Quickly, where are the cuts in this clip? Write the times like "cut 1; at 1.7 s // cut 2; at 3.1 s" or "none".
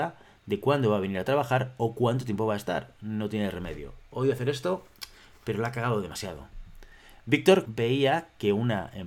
cut 1; at 7.6 s